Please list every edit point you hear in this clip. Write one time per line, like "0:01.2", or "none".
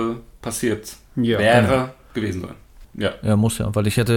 0:02.8